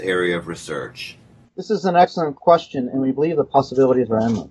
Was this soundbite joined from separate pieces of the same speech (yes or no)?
no